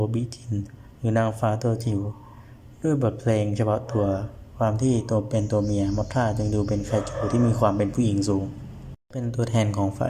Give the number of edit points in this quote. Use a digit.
1